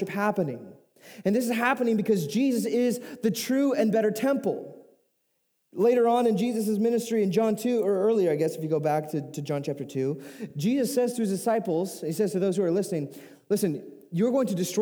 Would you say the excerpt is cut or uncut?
uncut